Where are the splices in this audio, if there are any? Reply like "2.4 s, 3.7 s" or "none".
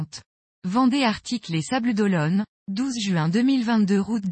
none